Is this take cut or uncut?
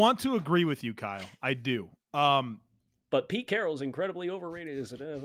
uncut